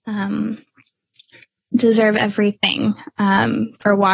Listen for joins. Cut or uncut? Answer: uncut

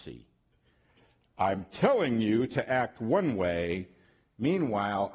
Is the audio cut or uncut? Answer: uncut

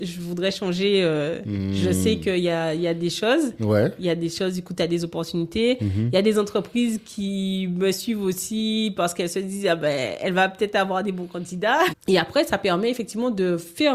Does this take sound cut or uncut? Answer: cut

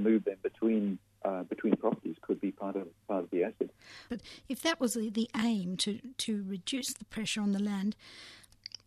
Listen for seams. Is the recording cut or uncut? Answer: cut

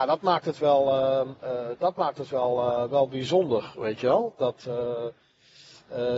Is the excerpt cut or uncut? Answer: uncut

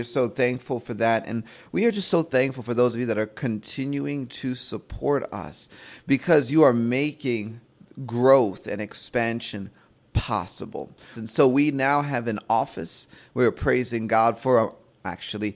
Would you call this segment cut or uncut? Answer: cut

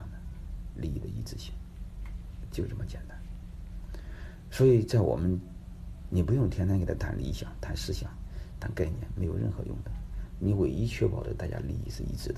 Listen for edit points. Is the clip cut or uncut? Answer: cut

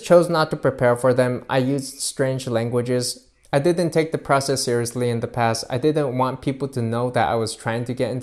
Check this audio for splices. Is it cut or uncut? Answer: uncut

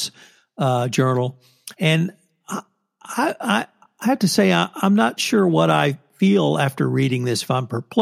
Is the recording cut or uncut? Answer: uncut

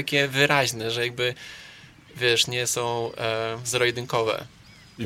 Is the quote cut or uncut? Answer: uncut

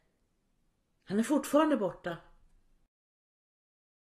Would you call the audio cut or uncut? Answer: uncut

